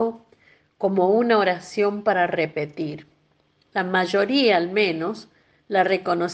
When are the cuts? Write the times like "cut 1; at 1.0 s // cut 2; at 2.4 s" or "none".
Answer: none